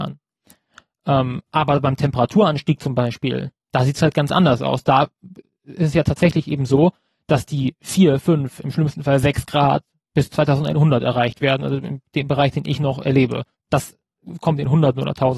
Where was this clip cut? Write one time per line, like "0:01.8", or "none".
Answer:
0:03.6
0:13.5